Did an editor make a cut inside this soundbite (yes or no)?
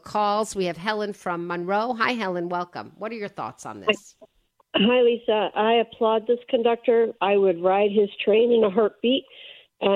no